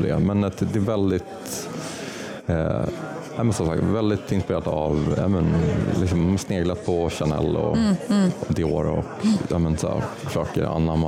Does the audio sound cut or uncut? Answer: uncut